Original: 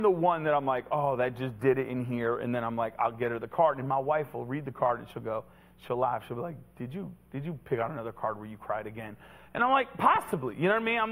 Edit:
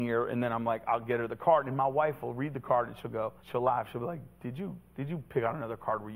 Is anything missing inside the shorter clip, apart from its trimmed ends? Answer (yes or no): yes